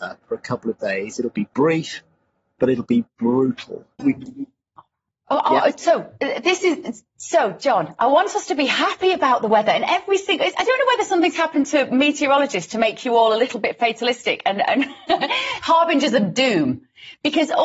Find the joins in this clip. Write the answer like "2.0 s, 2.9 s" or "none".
4.0 s